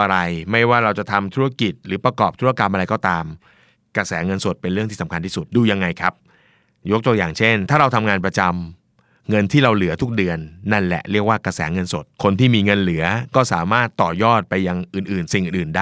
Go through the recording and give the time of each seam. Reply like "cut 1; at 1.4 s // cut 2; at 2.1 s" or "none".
cut 1; at 5.5 s // cut 2; at 12.1 s